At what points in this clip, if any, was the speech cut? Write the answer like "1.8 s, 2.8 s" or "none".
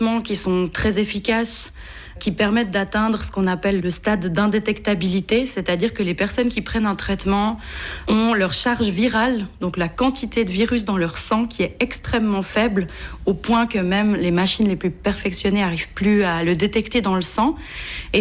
none